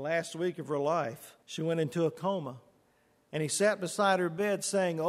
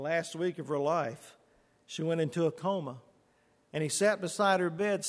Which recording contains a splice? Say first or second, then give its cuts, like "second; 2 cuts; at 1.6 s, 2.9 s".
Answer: first; 1 cut; at 1.4 s